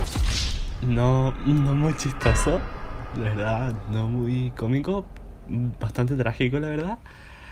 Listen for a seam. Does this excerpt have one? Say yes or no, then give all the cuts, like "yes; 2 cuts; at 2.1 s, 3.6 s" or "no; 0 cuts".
no; 0 cuts